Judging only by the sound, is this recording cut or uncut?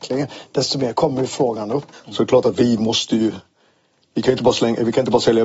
cut